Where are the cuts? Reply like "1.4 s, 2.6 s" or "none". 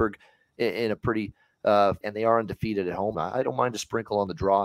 2.0 s, 3.1 s